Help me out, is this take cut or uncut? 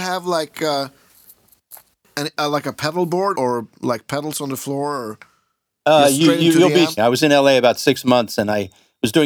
cut